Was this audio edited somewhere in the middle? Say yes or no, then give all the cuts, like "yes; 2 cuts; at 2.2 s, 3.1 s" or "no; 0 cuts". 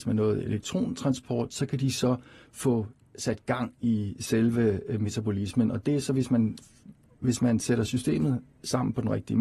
no; 0 cuts